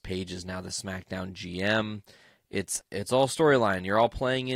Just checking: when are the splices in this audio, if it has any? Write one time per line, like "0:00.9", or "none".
0:02.8